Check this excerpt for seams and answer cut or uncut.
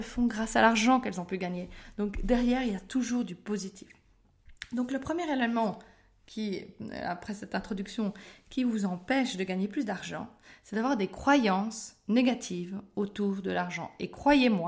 uncut